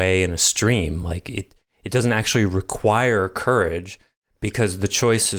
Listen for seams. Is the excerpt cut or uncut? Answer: uncut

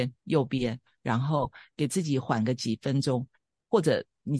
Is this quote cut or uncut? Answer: uncut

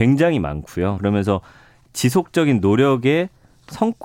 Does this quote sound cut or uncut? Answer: cut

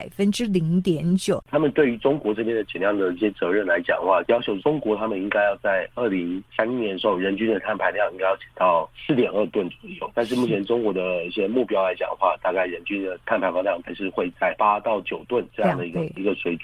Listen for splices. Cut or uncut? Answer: cut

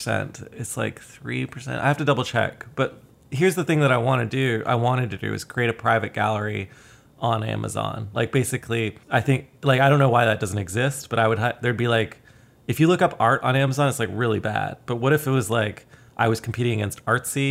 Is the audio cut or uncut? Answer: cut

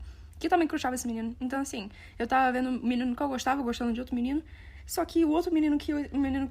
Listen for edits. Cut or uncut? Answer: uncut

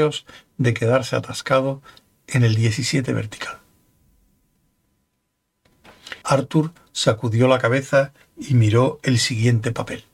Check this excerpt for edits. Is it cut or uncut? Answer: cut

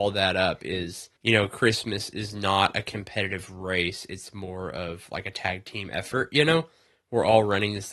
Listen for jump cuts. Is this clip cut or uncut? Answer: cut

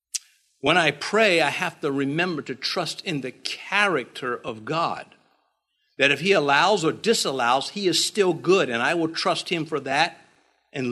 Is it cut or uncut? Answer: uncut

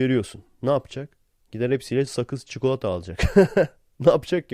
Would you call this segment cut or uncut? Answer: uncut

